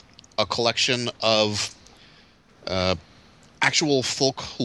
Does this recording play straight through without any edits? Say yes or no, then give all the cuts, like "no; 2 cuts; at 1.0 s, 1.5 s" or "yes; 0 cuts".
yes; 0 cuts